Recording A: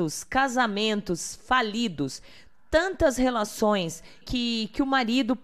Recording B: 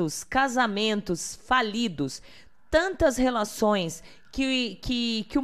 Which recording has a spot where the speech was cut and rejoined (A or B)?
A